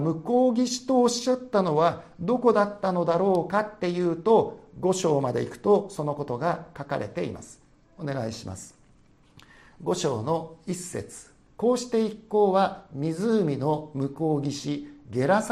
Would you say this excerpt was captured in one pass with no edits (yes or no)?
yes